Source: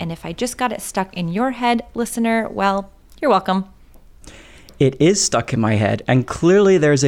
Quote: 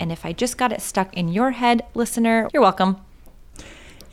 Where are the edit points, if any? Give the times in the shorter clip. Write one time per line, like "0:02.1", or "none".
0:02.5